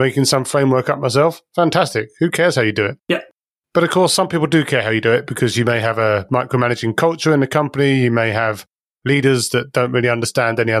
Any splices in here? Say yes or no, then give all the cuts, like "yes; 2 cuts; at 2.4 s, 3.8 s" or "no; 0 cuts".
no; 0 cuts